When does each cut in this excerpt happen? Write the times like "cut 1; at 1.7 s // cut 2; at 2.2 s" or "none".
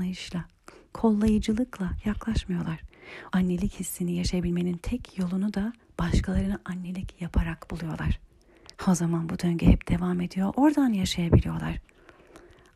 cut 1; at 3.3 s // cut 2; at 10.5 s